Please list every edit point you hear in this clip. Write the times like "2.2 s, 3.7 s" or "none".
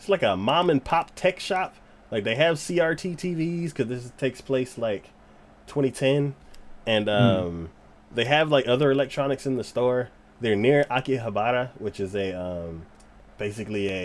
none